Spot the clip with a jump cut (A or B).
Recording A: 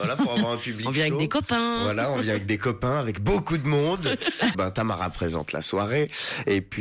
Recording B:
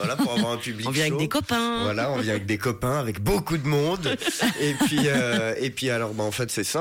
A